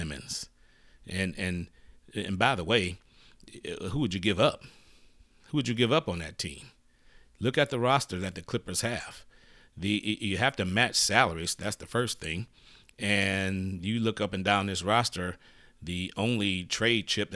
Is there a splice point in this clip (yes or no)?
no